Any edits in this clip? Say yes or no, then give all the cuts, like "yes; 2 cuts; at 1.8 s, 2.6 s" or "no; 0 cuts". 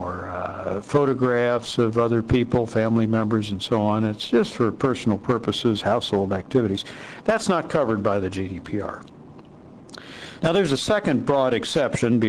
yes; 1 cut; at 10.4 s